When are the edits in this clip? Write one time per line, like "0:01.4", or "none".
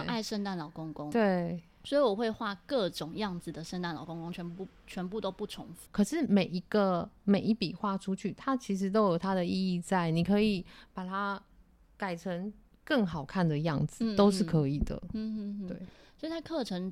0:05.9